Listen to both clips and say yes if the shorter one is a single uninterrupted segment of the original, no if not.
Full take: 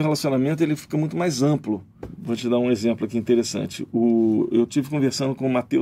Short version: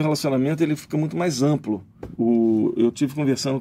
no